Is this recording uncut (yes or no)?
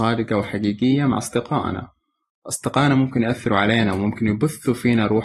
yes